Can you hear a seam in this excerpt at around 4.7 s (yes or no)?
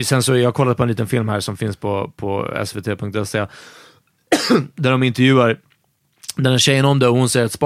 no